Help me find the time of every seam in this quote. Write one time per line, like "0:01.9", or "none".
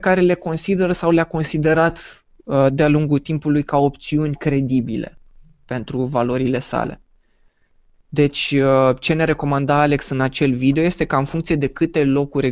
0:07.9